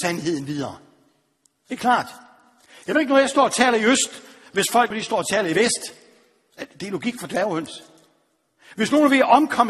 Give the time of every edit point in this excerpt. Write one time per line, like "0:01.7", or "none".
0:04.9